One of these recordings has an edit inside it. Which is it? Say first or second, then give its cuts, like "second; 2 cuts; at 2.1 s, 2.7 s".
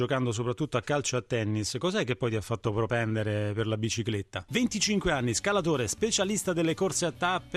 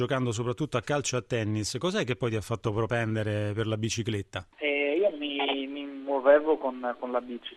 first; 1 cut; at 4.5 s